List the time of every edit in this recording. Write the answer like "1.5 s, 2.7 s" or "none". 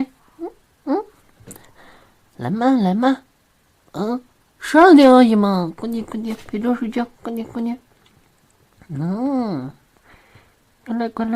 none